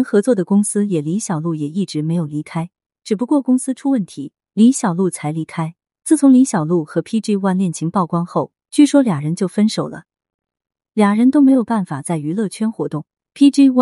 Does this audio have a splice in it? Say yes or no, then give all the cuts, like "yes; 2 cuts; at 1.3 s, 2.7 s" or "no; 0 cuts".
no; 0 cuts